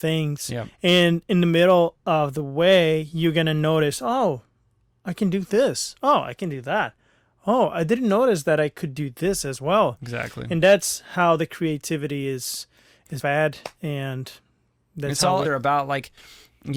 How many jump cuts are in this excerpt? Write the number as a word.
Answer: two